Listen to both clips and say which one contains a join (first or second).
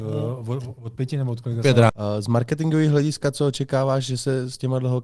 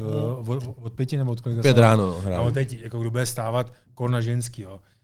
first